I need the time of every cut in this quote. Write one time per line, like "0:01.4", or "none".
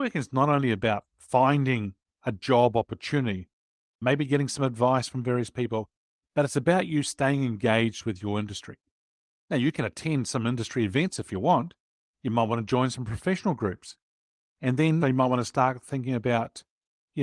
0:03.9
0:15.0